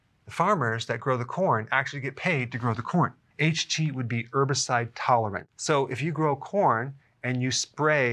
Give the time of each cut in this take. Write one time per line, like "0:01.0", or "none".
0:03.3